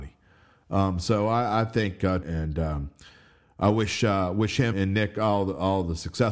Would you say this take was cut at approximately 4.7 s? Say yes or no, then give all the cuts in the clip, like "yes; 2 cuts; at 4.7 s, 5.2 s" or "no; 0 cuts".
yes; 2 cuts; at 2.2 s, 4.7 s